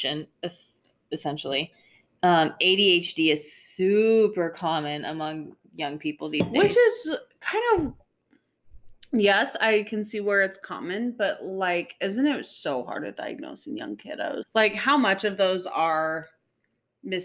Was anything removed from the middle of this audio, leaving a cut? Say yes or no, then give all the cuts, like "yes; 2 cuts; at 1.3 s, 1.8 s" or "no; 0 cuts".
yes; 1 cut; at 14.4 s